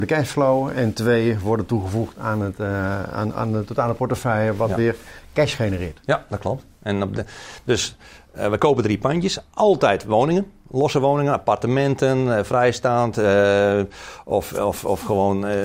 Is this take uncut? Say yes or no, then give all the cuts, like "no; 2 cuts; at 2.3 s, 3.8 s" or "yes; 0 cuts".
yes; 0 cuts